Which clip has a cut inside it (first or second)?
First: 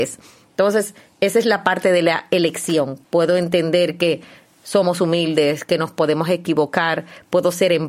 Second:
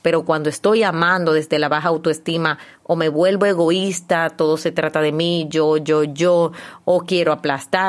first